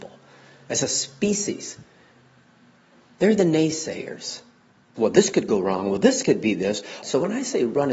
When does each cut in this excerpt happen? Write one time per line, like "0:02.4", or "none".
0:05.0
0:07.0